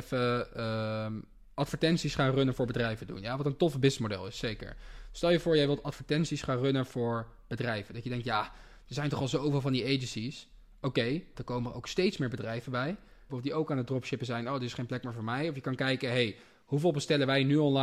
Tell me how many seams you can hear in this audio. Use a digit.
2